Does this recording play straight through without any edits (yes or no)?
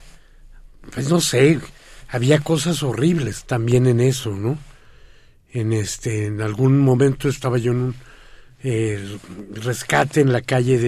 no